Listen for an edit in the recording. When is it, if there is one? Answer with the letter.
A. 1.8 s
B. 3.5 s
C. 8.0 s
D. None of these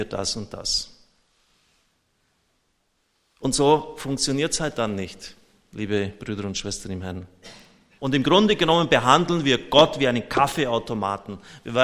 C